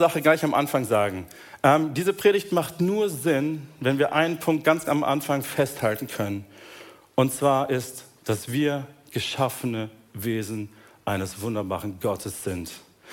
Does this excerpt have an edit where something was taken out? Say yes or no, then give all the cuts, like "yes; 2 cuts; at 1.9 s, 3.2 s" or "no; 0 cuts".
no; 0 cuts